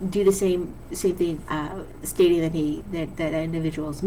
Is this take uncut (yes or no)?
no